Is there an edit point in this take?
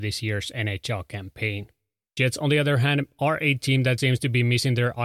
yes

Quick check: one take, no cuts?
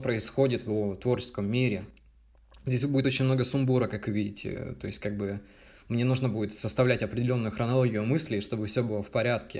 yes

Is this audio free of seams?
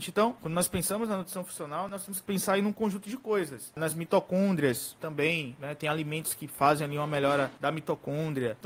no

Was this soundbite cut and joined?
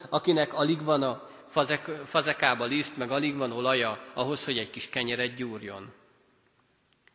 no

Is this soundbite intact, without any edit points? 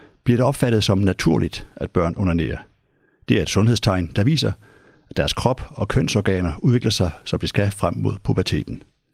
yes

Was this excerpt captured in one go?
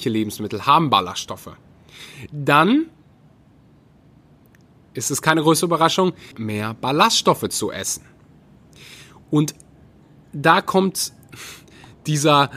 no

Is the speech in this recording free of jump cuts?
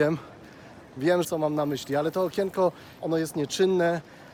no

